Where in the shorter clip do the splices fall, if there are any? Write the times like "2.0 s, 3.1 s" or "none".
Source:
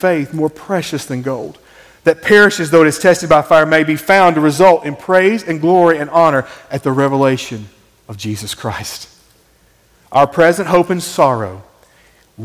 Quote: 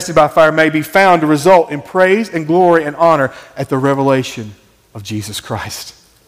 none